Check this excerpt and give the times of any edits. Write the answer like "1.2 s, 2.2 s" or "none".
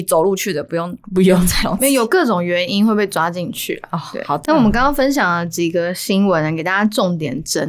4.5 s